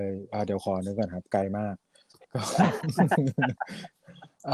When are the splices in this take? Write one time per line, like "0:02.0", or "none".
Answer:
none